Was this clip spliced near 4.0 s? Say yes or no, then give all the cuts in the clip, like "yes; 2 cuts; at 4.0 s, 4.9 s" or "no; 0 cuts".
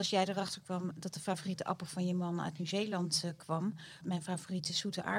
yes; 1 cut; at 4.0 s